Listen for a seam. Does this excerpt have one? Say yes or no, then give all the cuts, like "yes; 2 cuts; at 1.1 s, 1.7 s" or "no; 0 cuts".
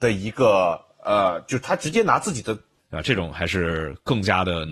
yes; 1 cut; at 2.8 s